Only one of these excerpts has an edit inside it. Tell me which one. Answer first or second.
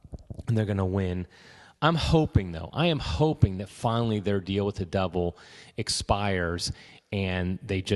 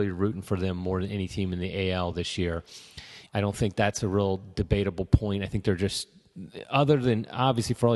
second